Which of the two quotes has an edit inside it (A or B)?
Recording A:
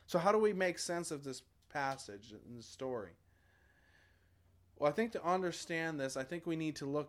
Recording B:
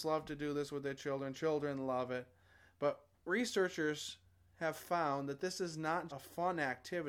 B